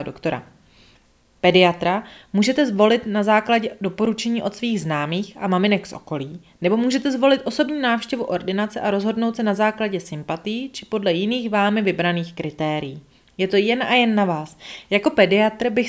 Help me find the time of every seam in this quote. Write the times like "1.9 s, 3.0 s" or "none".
14.8 s

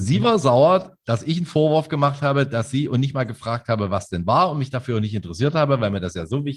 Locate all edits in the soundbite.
none

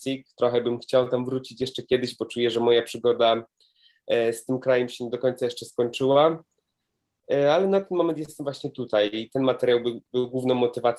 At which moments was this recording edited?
none

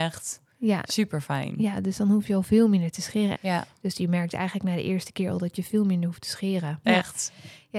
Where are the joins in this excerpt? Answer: 3.3 s, 6.8 s

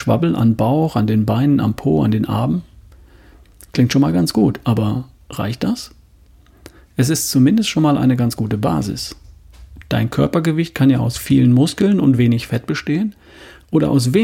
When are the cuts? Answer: 9.8 s

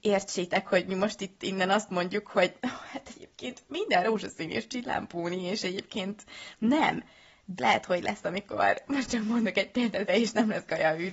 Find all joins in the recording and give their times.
7.6 s, 10.1 s

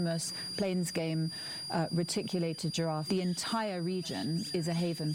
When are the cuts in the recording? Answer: 3.1 s

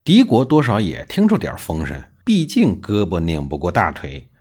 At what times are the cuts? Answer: 2.2 s

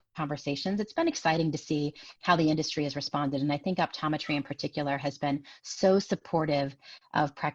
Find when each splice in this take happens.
none

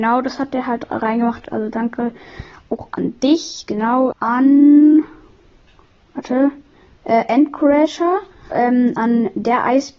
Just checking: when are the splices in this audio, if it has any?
1.5 s, 4.1 s, 8.5 s

